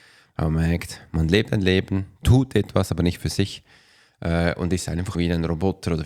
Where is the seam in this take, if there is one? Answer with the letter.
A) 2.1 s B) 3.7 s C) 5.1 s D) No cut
C